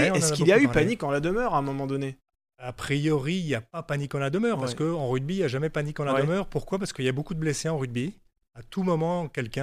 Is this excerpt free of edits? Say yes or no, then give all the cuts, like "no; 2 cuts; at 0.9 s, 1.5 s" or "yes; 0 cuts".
yes; 0 cuts